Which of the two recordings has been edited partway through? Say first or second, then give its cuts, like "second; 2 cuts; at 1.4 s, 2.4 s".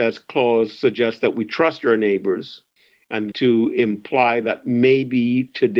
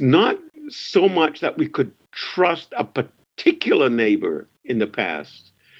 first; 1 cut; at 3.3 s